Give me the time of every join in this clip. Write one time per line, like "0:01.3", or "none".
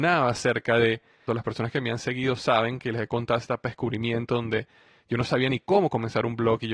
0:01.3